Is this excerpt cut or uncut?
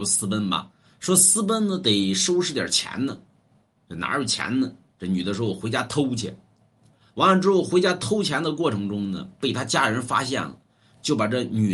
uncut